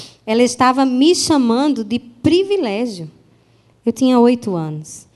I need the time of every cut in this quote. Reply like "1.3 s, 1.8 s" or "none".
3.7 s